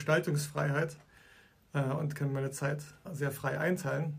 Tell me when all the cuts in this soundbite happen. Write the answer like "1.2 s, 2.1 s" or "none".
3.0 s